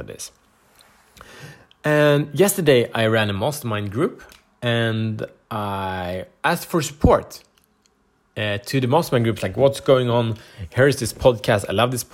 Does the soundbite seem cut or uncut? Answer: uncut